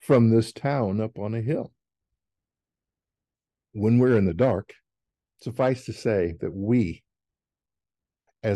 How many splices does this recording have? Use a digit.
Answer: 0